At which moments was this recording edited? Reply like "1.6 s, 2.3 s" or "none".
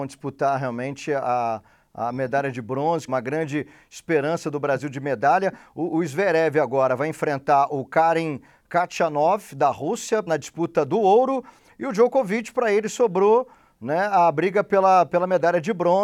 3.1 s, 10.3 s